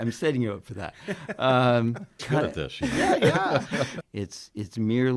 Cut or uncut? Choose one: cut